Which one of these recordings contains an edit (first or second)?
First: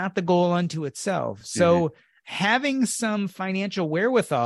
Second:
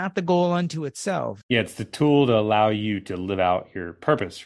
second